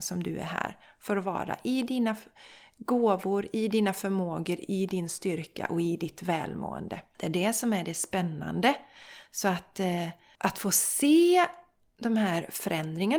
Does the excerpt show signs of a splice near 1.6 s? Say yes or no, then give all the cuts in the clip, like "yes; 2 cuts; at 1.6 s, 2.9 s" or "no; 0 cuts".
no; 0 cuts